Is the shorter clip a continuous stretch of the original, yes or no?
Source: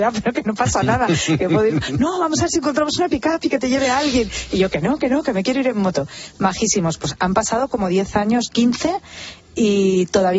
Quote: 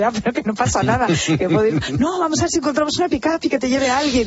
yes